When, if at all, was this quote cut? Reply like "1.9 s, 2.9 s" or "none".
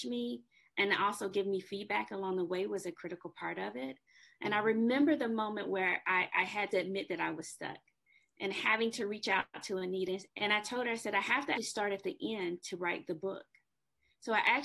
10.3 s, 11.6 s